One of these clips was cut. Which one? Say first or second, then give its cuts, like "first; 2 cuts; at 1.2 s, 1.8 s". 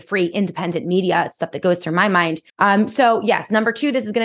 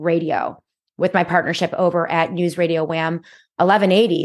first; 1 cut; at 2.5 s